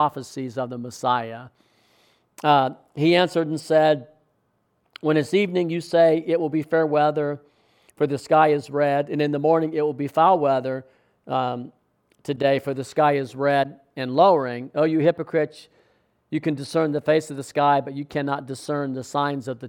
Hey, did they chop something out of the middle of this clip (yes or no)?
no